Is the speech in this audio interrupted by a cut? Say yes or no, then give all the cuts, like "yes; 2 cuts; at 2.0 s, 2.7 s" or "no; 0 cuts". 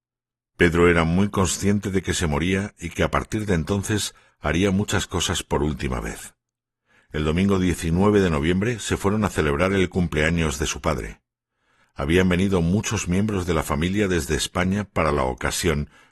no; 0 cuts